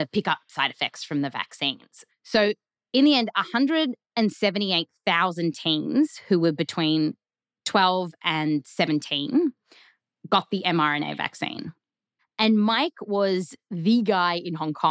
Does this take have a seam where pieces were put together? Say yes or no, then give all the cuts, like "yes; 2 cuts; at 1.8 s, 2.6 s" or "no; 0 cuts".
yes; 2 cuts; at 2.1 s, 12.2 s